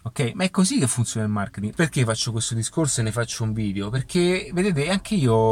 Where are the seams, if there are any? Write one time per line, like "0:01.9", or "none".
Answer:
0:01.7